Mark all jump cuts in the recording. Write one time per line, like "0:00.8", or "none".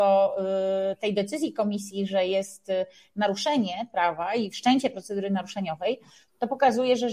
none